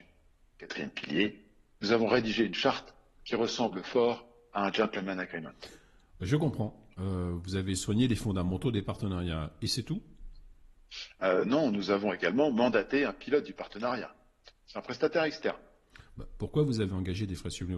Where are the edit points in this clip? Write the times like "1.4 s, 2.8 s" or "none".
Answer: none